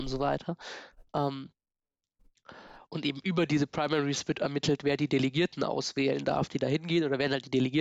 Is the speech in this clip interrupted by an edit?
no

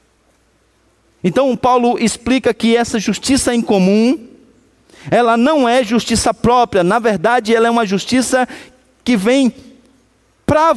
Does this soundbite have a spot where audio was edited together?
no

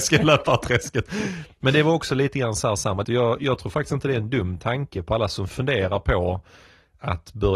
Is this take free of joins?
no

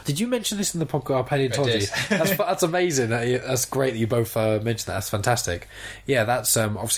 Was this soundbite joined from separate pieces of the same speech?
no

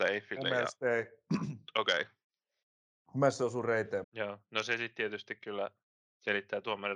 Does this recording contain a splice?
yes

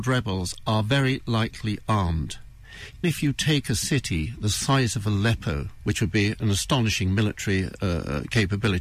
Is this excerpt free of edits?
no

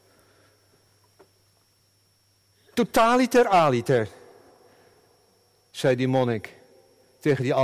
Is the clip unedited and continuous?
yes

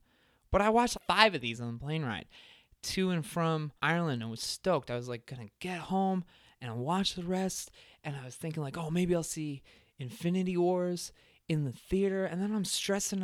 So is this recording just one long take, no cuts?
no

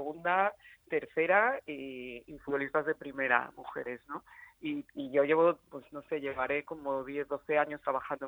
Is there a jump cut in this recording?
no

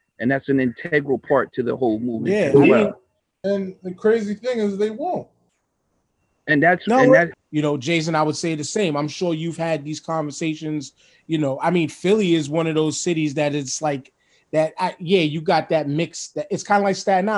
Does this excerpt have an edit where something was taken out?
yes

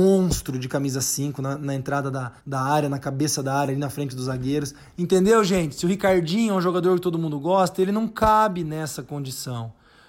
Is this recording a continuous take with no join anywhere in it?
no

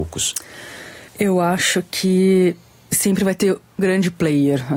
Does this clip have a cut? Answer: yes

